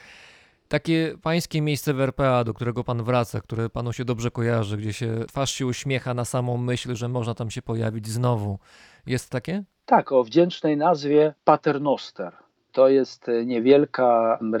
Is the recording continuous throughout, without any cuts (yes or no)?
yes